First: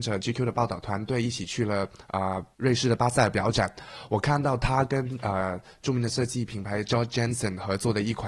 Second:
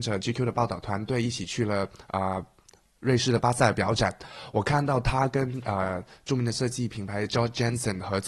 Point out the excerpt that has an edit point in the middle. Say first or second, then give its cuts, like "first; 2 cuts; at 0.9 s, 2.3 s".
first; 1 cut; at 2.5 s